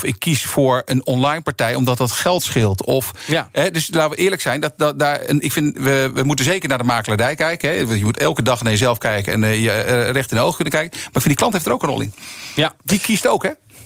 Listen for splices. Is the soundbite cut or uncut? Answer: uncut